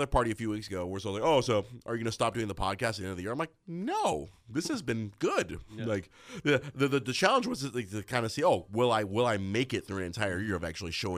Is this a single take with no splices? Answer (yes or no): yes